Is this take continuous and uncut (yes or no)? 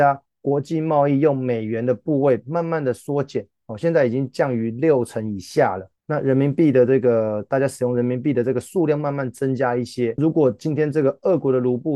no